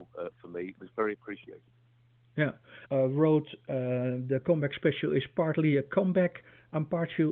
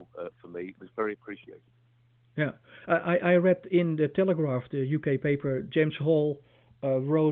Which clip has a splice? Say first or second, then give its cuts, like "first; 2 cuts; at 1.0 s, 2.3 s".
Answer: first; 1 cut; at 2.9 s